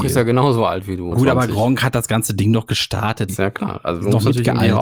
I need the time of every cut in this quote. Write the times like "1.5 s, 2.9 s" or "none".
1.1 s, 3.3 s